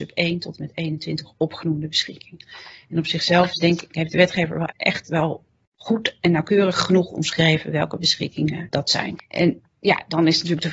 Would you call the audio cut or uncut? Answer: cut